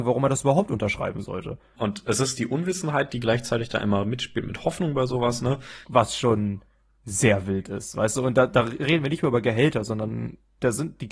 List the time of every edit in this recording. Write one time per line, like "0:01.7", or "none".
0:01.8
0:05.8

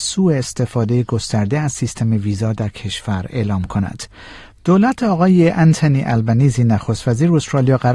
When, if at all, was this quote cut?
0:04.5

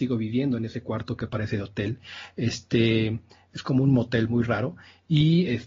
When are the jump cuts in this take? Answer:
none

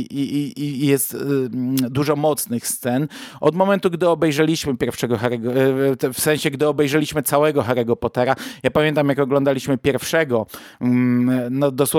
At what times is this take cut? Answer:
none

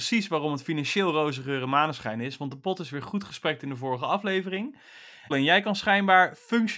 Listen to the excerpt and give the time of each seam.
0:05.3

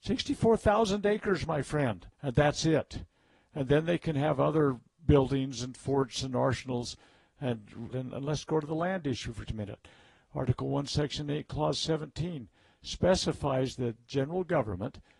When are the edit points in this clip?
0:02.1
0:07.9
0:09.5

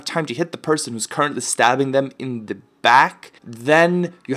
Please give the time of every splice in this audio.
0:03.4

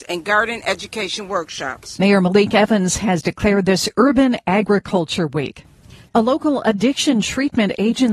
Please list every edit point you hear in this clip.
none

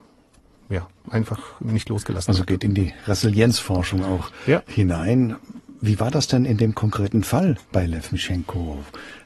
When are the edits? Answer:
none

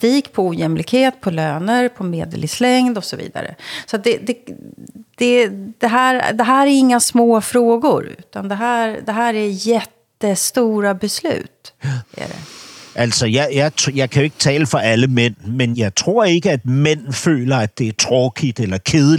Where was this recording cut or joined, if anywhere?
0:11.8
0:15.7

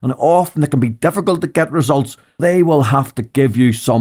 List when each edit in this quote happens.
0:02.4

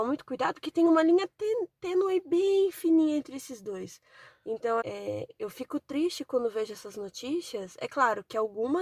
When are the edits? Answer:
0:04.8

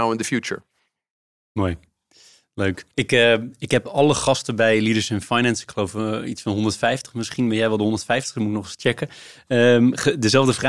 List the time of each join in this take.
0:02.9

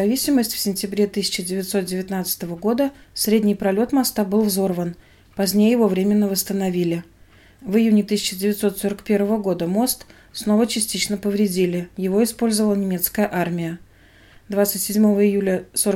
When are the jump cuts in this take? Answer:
none

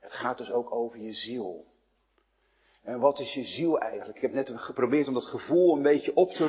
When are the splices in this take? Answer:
none

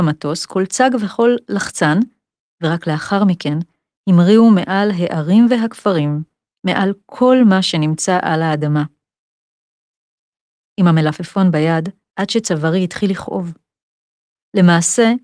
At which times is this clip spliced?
0:12.1

